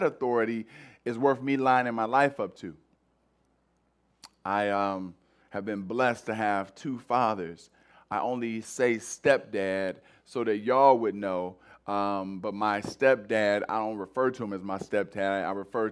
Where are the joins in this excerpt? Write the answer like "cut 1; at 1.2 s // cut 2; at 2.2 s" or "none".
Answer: none